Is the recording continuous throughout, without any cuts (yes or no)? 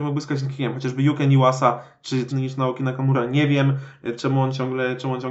no